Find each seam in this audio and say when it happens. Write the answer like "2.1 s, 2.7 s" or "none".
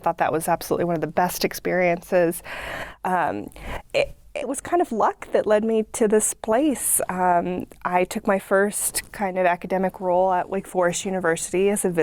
4.4 s